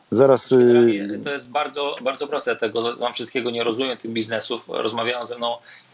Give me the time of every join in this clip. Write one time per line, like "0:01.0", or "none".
none